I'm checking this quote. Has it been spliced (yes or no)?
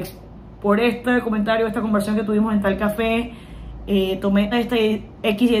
yes